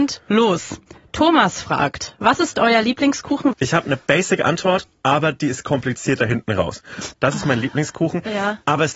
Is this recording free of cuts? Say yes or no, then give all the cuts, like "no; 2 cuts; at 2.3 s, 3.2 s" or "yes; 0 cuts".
no; 2 cuts; at 3.5 s, 7.1 s